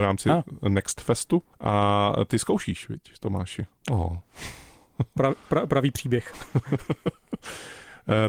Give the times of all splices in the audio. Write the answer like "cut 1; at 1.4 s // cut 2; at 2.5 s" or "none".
cut 1; at 1.5 s // cut 2; at 3.8 s